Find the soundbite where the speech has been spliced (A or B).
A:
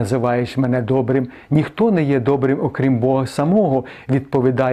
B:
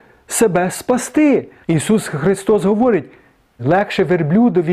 B